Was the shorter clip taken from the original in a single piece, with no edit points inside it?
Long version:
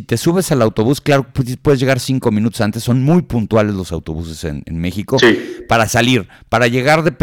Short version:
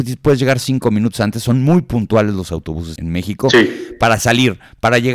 no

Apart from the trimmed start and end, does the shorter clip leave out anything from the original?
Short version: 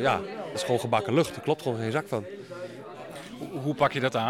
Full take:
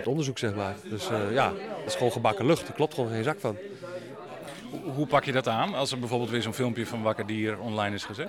no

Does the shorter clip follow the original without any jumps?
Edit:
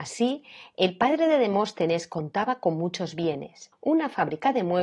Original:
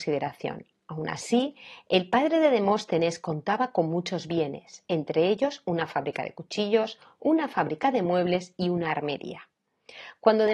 no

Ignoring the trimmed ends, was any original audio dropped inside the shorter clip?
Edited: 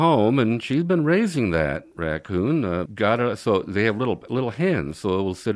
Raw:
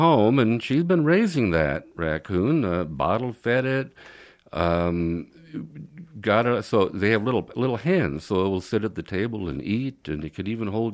yes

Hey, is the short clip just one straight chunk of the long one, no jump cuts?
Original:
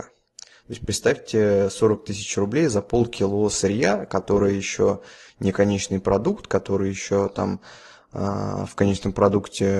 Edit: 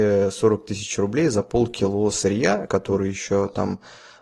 no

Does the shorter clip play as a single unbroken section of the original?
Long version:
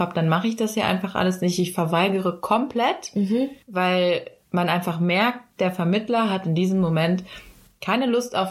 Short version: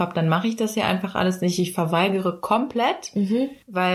yes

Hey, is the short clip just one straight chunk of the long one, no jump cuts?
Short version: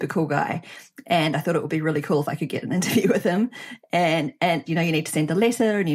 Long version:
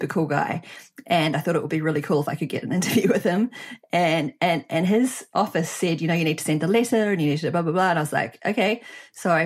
no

